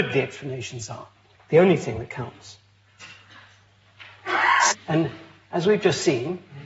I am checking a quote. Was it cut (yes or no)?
yes